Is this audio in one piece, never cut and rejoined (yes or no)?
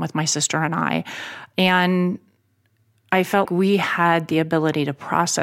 no